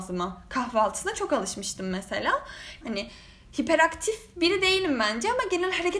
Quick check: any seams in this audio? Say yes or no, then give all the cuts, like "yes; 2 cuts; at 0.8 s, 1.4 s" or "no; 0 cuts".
yes; 1 cut; at 2.8 s